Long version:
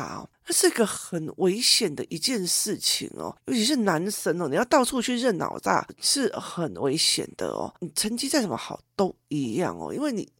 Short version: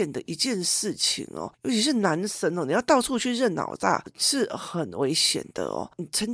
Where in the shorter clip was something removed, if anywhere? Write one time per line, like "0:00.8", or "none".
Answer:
none